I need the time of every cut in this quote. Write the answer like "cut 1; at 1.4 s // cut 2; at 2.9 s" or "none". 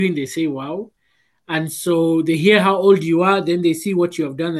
none